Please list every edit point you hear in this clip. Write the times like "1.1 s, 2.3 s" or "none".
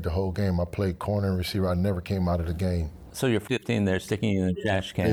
3.1 s